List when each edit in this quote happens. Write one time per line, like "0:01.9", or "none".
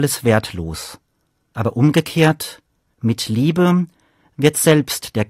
none